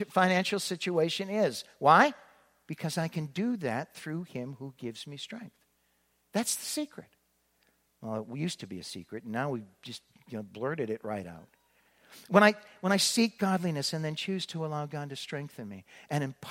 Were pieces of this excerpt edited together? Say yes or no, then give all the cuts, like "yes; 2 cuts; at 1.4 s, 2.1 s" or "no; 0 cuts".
no; 0 cuts